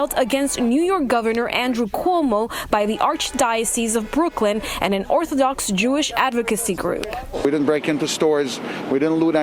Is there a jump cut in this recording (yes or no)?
no